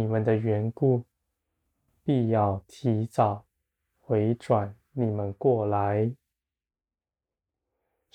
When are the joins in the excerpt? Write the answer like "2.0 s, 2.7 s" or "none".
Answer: none